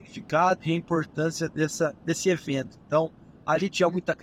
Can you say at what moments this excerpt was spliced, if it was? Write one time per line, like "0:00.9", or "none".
0:02.8